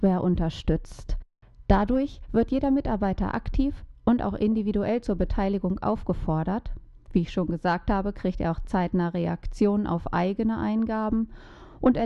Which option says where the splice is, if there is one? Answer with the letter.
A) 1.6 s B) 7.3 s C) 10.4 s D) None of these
D